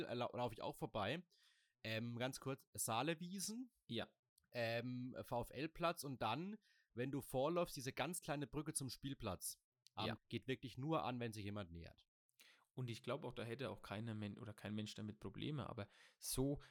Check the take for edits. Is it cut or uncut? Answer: cut